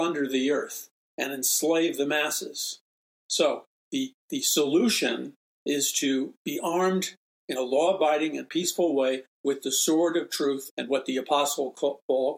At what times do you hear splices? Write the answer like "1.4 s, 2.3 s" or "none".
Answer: 3.1 s, 10.7 s